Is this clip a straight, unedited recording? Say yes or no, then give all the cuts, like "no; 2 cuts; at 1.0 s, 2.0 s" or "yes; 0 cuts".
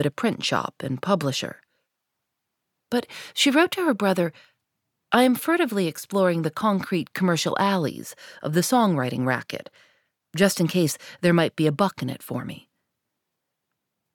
yes; 0 cuts